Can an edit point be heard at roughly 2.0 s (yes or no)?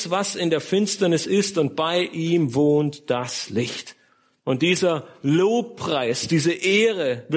no